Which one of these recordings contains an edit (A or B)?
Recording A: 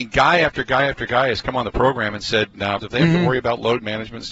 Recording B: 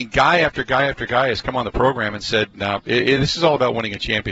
A